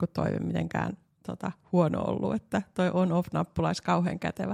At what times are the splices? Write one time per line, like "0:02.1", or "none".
none